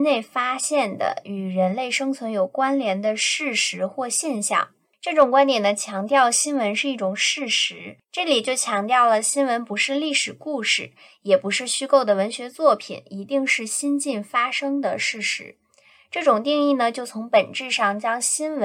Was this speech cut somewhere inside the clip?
yes; 1 cut; at 8.0 s

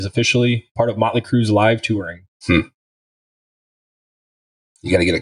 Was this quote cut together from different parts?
yes; 1 cut; at 2.4 s

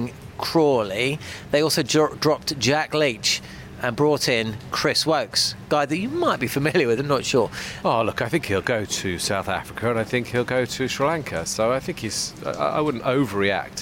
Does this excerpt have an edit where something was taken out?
yes; 1 cut; at 7.8 s

